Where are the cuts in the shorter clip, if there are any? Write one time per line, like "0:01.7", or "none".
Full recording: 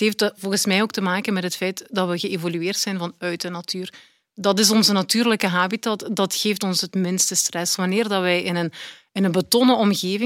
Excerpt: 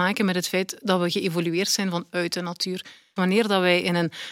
0:03.2